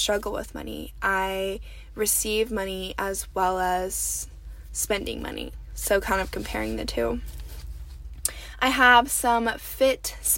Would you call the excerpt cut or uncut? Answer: uncut